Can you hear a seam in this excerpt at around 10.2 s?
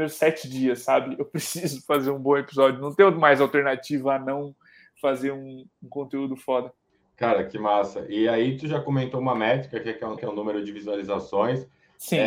yes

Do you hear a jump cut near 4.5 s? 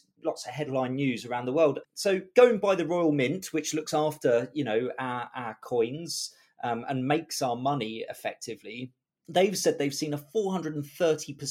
no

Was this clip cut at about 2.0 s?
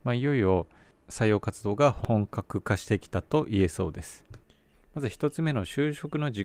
no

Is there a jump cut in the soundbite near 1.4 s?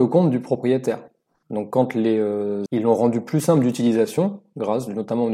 yes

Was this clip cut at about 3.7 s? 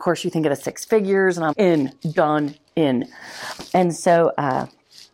no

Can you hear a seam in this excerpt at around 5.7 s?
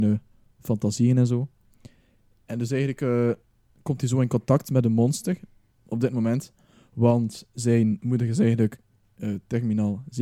yes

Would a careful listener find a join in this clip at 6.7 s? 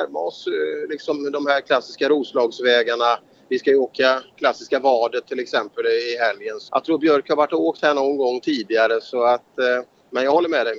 yes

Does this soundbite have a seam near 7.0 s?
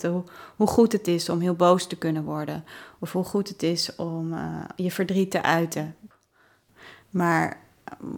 yes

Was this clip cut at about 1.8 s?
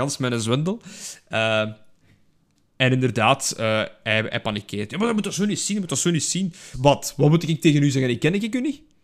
no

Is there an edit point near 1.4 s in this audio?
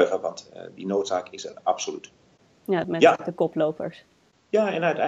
no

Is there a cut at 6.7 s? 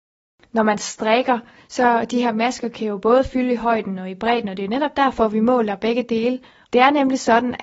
yes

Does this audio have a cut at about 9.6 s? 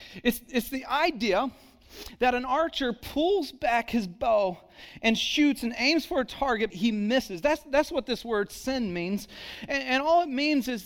no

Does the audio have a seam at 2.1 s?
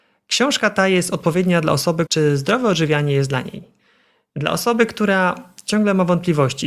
yes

